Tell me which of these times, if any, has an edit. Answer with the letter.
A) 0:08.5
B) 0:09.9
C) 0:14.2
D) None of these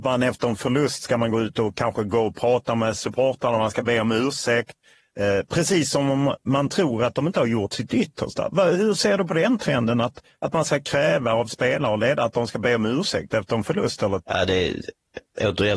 C